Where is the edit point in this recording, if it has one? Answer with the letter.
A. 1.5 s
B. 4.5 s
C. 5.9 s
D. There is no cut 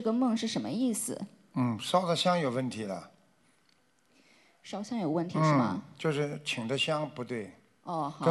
D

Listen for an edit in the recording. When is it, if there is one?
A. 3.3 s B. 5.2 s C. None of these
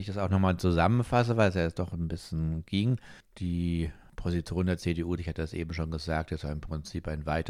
B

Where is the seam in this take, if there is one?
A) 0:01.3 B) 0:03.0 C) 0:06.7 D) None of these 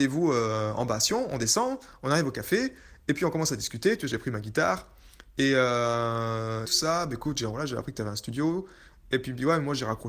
C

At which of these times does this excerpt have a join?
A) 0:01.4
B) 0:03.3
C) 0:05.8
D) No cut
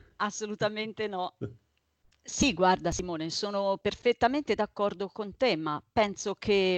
A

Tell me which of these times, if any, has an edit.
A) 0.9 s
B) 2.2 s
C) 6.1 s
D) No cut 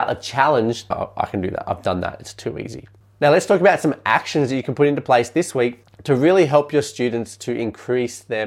A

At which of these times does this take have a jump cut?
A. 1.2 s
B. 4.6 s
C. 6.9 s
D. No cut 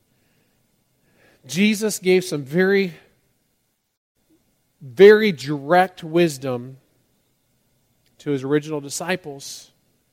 D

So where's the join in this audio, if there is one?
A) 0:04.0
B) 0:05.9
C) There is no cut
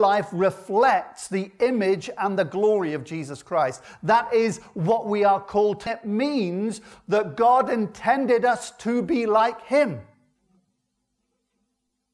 B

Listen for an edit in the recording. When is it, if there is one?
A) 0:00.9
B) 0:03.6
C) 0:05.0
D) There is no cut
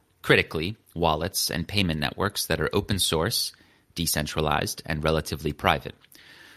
A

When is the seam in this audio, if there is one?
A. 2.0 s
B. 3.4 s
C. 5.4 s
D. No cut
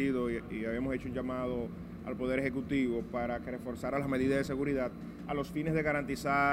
D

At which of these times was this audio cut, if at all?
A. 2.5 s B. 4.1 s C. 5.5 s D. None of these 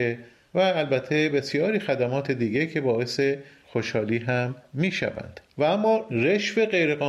C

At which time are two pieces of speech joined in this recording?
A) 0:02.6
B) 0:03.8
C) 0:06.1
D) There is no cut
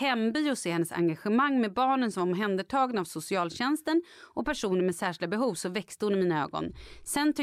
D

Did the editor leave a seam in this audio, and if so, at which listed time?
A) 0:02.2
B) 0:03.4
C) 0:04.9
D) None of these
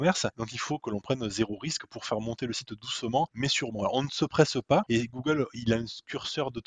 C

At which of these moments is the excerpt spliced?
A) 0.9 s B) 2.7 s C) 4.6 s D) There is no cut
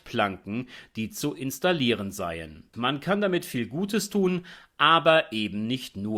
B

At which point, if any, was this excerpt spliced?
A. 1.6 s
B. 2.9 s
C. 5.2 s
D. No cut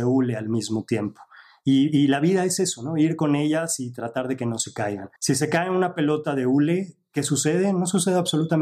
C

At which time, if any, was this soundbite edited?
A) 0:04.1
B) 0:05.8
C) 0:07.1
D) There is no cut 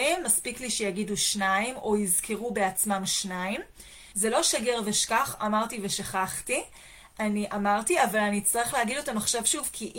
A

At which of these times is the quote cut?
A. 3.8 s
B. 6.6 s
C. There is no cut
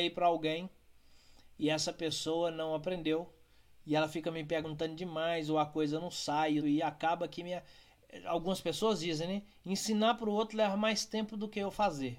B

